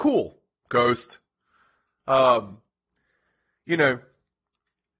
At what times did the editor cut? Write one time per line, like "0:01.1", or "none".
none